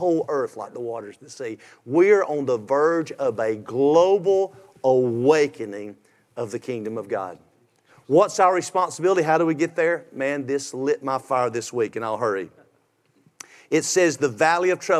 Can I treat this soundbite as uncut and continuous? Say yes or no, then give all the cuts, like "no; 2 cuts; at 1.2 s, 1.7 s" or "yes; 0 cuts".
yes; 0 cuts